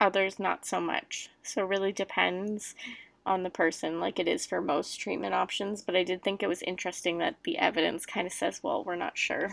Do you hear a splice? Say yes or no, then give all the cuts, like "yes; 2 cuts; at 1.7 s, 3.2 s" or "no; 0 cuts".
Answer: no; 0 cuts